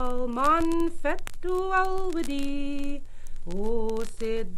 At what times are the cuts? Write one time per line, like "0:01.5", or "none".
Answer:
none